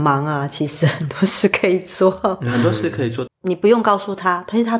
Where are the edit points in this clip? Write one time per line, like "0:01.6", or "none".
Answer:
0:03.3